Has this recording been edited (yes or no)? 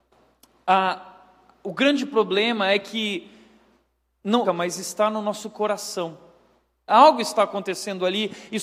yes